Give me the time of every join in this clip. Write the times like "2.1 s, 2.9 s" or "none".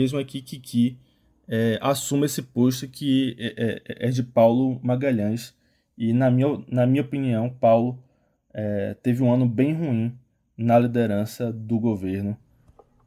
none